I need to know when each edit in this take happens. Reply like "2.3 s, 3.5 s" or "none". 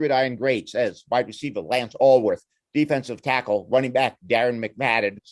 none